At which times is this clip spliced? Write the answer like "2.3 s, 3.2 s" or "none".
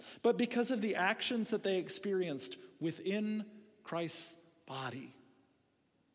none

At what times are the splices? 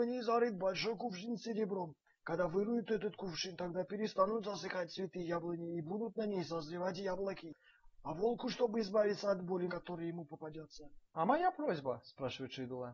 9.7 s, 11.1 s

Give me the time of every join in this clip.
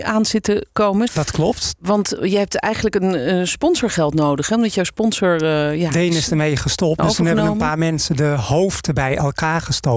1.1 s, 7.0 s

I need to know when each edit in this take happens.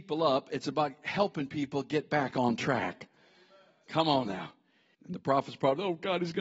4.9 s

